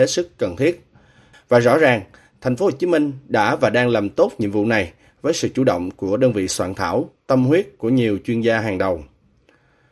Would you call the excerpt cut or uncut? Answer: cut